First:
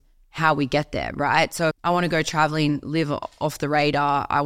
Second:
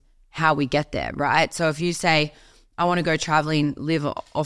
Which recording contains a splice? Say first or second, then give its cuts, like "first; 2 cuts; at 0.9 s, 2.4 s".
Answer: first; 1 cut; at 1.7 s